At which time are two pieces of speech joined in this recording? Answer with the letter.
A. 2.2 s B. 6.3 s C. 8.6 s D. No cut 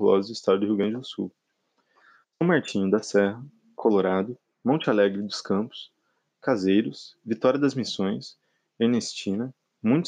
A